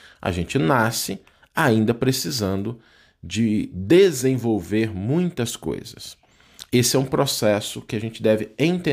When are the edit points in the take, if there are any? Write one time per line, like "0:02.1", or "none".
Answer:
none